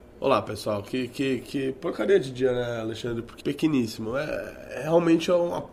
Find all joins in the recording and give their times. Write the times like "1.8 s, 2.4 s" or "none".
3.4 s